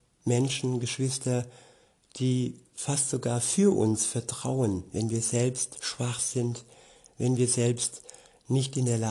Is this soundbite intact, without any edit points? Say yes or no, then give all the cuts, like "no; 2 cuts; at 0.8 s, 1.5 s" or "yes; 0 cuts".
yes; 0 cuts